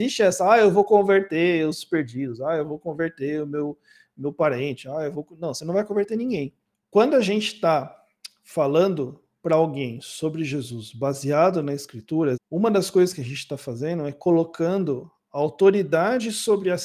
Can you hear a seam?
yes; 2 cuts; at 6.7 s, 12.3 s

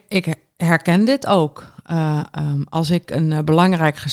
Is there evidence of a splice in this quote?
no; 0 cuts

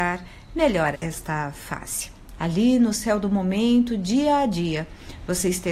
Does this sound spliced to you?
yes; 2 cuts; at 0.9 s, 2.4 s

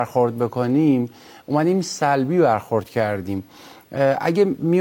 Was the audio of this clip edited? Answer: no; 0 cuts

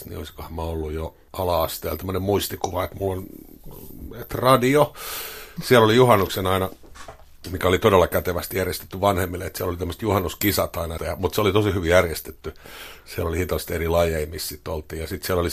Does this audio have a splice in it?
yes; 2 cuts; at 5.6 s, 11.0 s

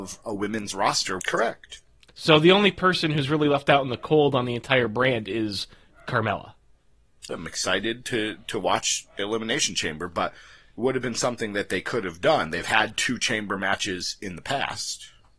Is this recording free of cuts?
no; 2 cuts; at 1.2 s, 7.3 s

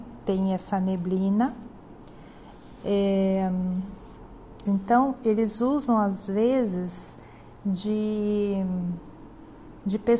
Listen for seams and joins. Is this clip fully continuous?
no; 1 cut; at 4.7 s

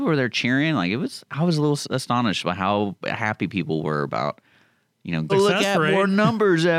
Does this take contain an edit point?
yes; 1 cut; at 5.3 s

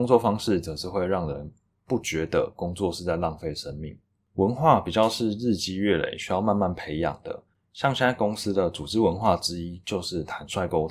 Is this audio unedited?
no; 2 cuts; at 4.3 s, 7.5 s

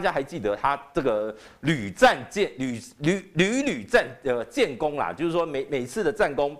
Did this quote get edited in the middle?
no; 0 cuts

